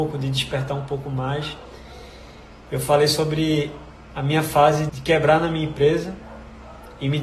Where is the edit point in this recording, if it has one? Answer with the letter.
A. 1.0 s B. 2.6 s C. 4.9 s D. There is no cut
C